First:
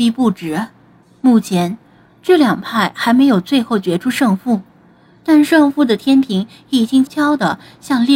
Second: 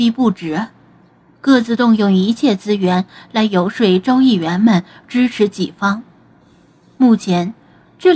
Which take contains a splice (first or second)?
first